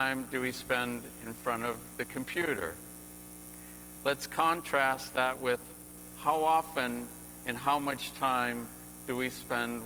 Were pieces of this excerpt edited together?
yes; 1 cut; at 4.0 s

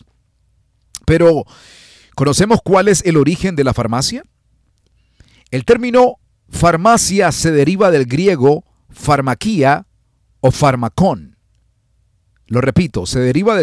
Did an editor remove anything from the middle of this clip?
no; 0 cuts

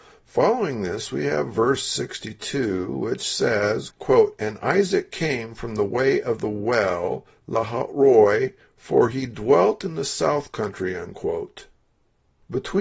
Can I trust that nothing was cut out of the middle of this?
no; 1 cut; at 3.9 s

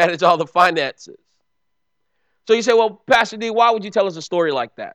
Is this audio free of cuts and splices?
yes; 0 cuts

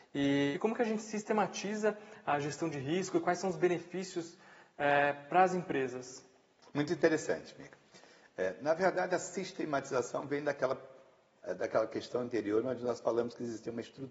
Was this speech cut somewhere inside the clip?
no; 0 cuts

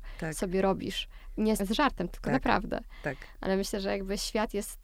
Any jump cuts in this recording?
yes; 1 cut; at 1.6 s

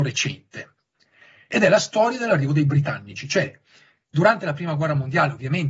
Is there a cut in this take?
no; 0 cuts

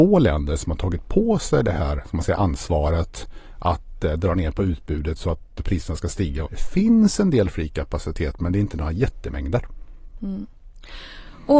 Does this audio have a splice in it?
yes; 1 cut; at 6.5 s

